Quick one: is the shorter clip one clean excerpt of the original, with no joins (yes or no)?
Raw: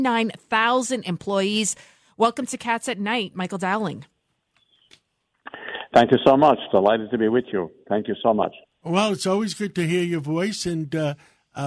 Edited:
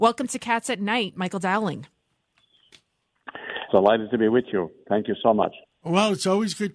no